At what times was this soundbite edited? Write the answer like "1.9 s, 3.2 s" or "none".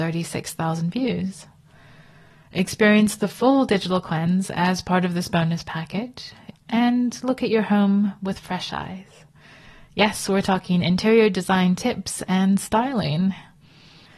6.5 s

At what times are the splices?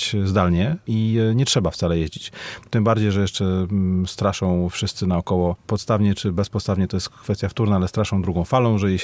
2.7 s

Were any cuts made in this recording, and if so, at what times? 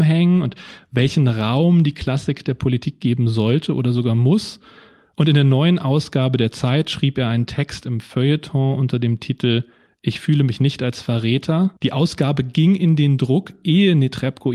11.8 s

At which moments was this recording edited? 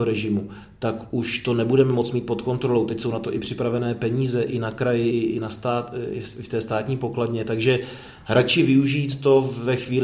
5.1 s

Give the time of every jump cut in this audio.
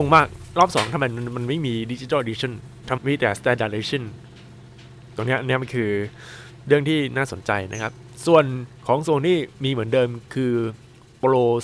3.0 s

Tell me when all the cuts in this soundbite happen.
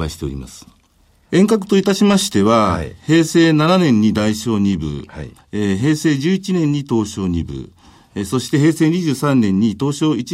none

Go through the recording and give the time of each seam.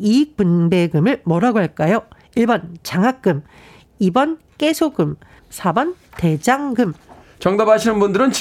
5.4 s

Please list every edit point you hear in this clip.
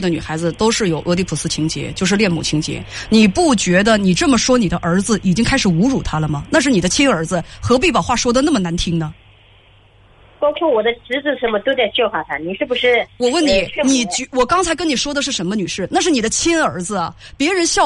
none

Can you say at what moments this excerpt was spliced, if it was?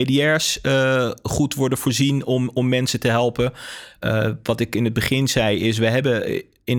none

